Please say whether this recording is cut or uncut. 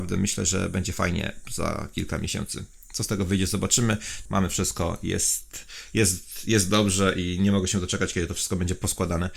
cut